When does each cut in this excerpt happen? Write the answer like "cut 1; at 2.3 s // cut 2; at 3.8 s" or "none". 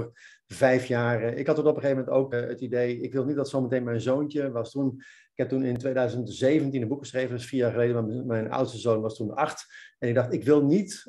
cut 1; at 2.3 s